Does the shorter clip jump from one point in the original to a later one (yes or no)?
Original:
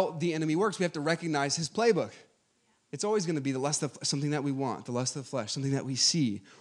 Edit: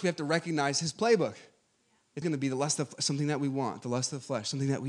yes